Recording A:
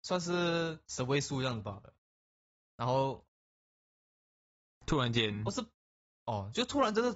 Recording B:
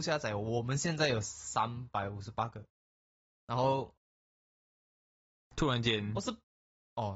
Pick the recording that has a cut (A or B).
B